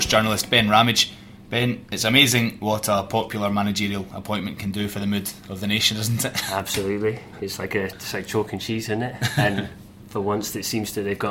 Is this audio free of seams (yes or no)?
yes